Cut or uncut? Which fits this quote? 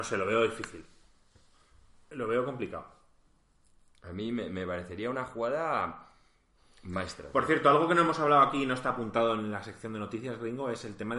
uncut